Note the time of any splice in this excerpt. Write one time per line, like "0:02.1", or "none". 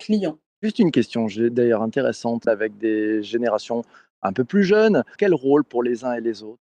0:02.5
0:05.2